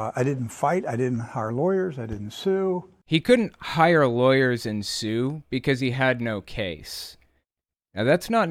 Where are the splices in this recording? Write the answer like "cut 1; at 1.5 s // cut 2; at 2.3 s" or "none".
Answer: none